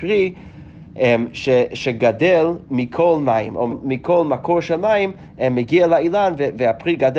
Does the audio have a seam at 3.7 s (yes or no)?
yes